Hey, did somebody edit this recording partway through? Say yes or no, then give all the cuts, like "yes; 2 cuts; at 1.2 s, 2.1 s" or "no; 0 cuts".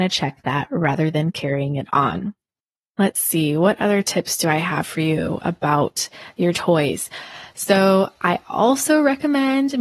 no; 0 cuts